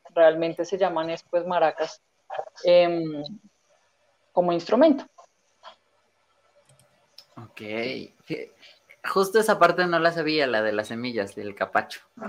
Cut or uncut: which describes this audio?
uncut